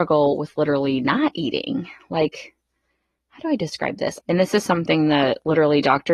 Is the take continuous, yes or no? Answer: no